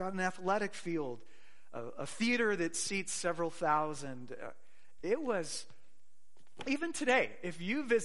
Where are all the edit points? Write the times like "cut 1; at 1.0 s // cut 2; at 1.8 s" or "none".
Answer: none